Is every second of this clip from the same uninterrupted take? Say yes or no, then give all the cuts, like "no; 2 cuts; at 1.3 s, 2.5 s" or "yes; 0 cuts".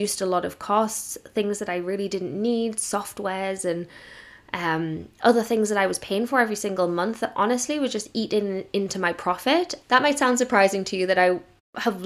no; 1 cut; at 9.8 s